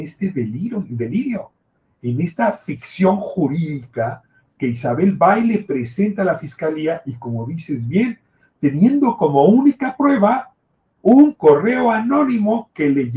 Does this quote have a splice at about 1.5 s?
no; 0 cuts

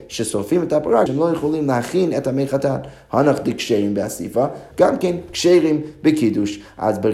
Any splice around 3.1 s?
no; 2 cuts; at 1.1 s, 4.7 s

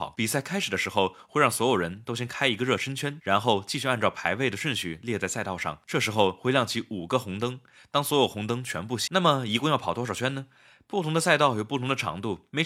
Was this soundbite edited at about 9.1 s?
yes; 1 cut; at 9.1 s

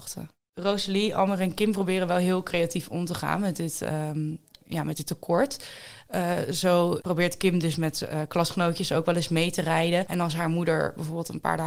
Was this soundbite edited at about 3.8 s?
no; 0 cuts

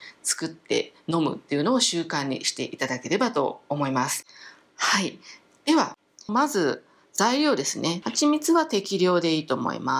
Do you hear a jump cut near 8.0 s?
yes; 2 cuts; at 6.3 s, 8.0 s

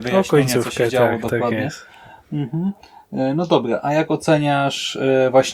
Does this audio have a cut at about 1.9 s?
no; 0 cuts

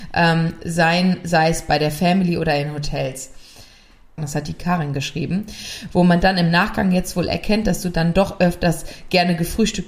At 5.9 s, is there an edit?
no; 1 cut; at 4.2 s

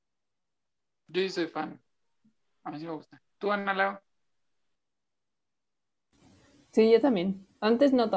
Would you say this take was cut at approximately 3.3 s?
yes; 1 cut; at 3.3 s

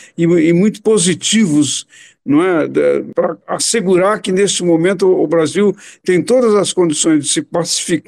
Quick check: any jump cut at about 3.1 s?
no; 0 cuts

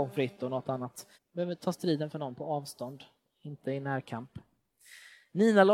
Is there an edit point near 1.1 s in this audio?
yes; 1 cut; at 1.1 s

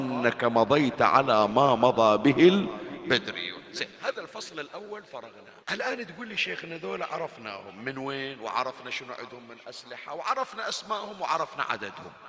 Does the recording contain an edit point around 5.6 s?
yes; 1 cut; at 5.6 s

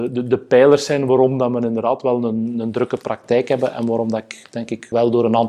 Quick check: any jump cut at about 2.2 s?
no; 0 cuts

